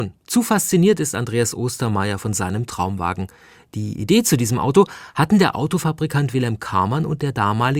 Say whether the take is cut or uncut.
uncut